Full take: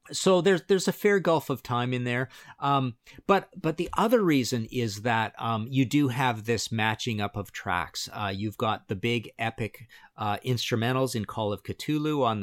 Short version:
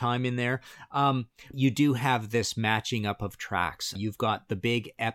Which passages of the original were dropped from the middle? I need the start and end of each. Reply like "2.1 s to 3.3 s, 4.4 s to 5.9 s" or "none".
3.2 s to 5.7 s, 8.1 s to 8.3 s